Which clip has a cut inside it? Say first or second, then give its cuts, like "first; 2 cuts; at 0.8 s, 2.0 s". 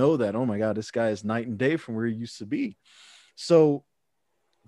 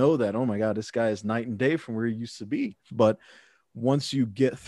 second; 1 cut; at 2.9 s